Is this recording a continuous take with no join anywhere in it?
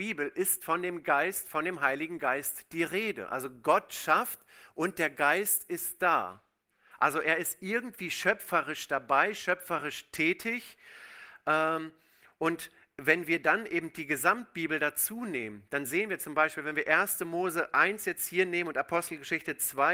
yes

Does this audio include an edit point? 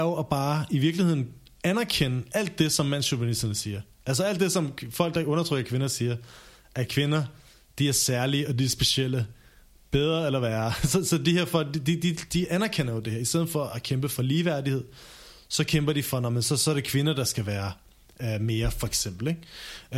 no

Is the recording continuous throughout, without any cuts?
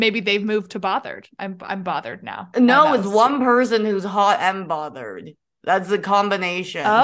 yes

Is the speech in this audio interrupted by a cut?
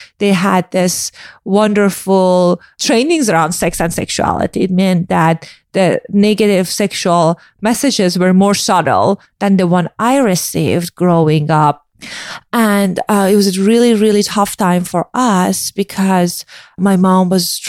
no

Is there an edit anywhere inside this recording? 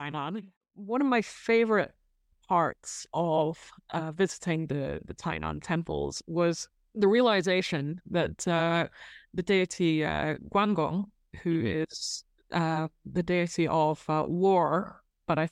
no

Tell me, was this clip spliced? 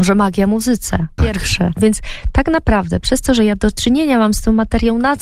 yes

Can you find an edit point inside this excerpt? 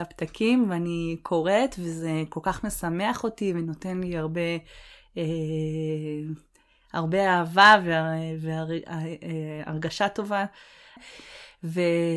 yes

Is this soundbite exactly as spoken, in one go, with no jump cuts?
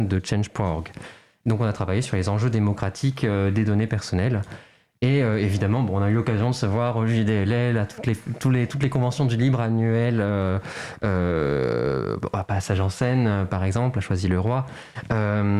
yes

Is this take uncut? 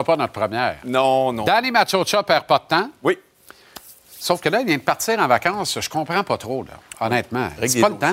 yes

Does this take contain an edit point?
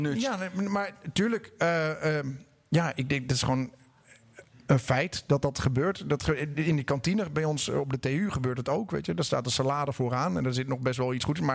no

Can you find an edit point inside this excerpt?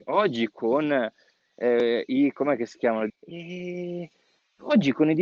yes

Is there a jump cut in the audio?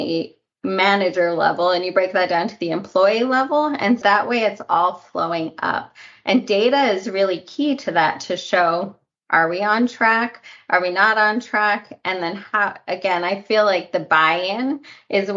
yes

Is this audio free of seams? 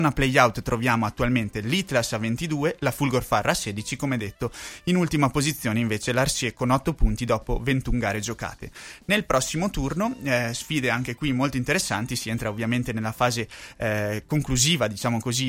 yes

